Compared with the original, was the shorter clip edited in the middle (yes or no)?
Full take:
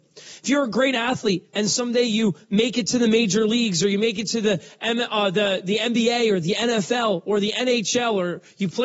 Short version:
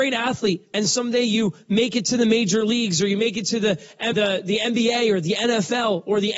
yes